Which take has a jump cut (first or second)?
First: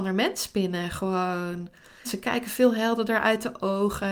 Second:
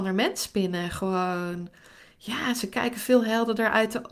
first